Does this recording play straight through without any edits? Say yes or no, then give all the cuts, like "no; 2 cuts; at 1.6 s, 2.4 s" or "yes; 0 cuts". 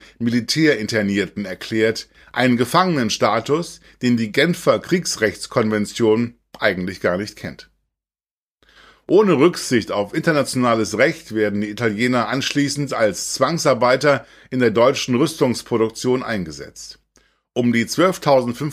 yes; 0 cuts